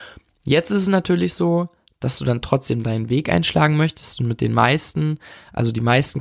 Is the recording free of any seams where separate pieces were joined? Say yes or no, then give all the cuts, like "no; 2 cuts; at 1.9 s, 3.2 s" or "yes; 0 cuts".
yes; 0 cuts